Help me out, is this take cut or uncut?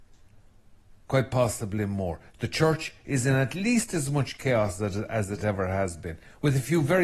uncut